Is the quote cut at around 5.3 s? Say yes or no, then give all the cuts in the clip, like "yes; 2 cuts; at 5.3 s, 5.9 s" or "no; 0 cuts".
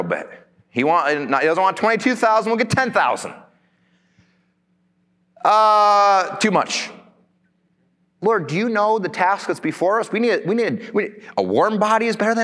no; 1 cut; at 8.1 s